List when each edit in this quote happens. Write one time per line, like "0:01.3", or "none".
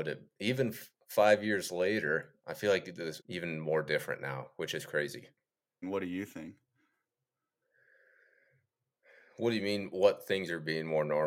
0:03.2
0:05.8